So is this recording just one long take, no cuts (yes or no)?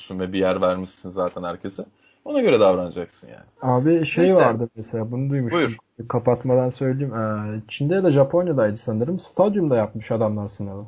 yes